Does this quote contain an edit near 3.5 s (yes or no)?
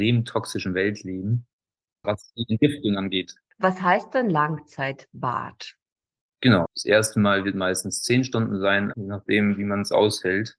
no